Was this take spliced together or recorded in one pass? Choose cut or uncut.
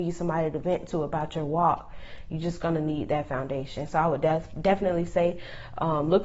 uncut